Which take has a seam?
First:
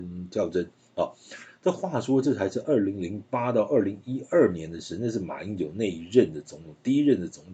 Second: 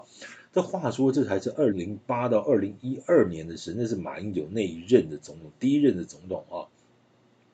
second; 1 cut; at 1.7 s

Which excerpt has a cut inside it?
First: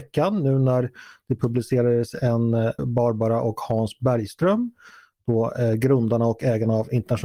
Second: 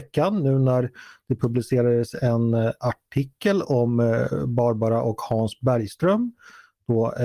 first; 1 cut; at 2.8 s

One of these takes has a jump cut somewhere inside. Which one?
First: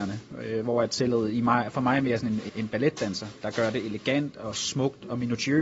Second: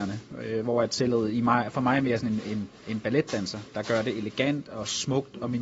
first; 1 cut; at 2.5 s

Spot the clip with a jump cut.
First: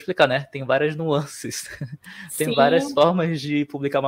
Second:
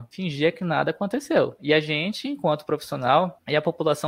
second; 1 cut; at 1.6 s

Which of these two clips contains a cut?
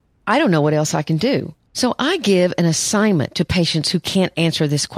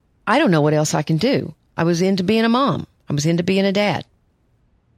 first; 1 cut; at 1.7 s

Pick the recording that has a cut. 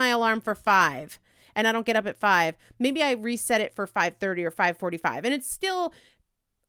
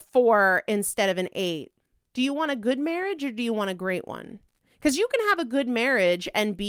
second; 1 cut; at 2.1 s

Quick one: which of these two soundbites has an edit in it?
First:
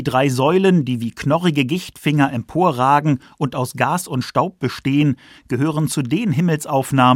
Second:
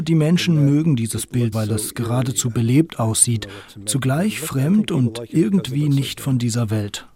second; 1 cut; at 1.5 s

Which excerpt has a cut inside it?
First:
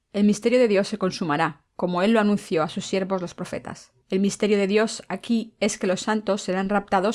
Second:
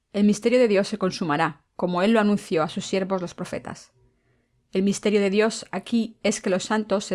first; 1 cut; at 4.0 s

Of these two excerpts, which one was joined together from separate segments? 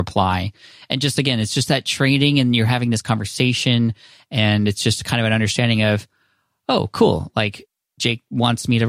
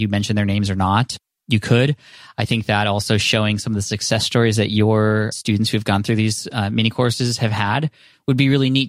second; 1 cut; at 5.3 s

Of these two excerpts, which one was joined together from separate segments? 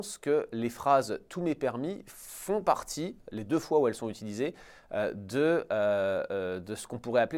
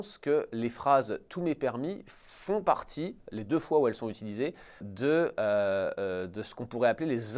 second; 1 cut; at 4.8 s

